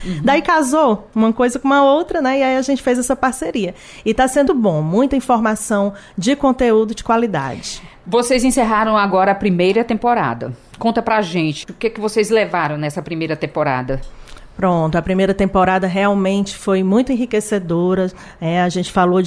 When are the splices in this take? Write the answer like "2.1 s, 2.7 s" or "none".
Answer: 4.5 s